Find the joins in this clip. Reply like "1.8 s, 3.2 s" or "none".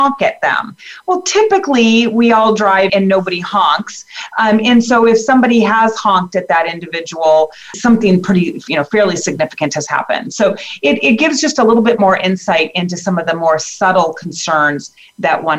2.9 s, 7.7 s